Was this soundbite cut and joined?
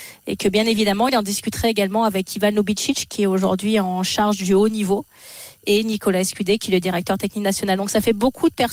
no; 0 cuts

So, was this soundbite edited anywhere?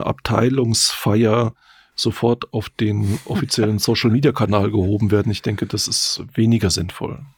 no; 0 cuts

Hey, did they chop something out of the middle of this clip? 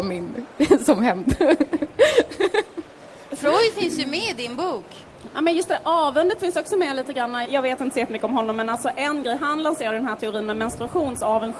yes; 2 cuts; at 5.3 s, 7.4 s

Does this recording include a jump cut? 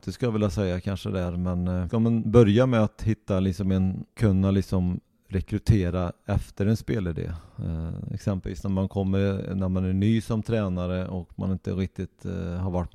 yes; 2 cuts; at 4.1 s, 8.1 s

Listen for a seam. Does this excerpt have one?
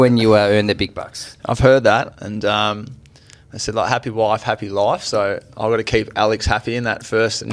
no; 0 cuts

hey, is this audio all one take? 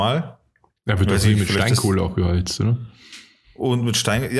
yes; 0 cuts

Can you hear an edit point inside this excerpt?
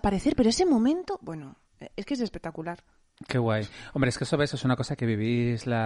no; 0 cuts

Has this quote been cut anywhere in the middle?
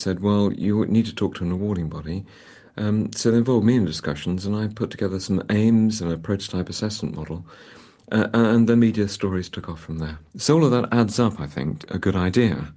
yes; 2 cuts; at 10.3 s, 11.8 s

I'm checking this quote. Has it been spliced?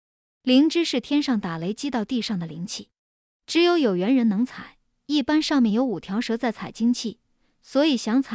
no; 0 cuts

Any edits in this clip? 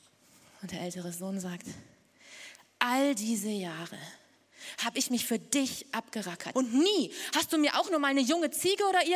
yes; 1 cut; at 6.5 s

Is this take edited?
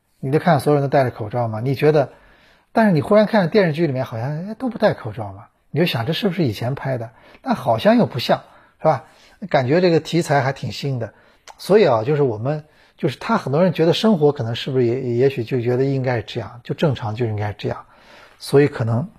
no; 0 cuts

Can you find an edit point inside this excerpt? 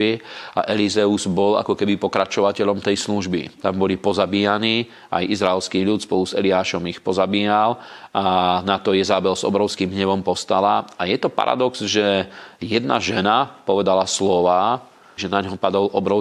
yes; 2 cuts; at 3.6 s, 15.2 s

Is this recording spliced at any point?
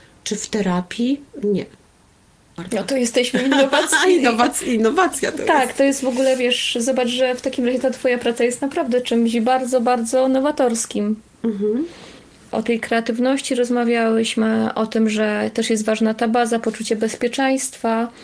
no; 0 cuts

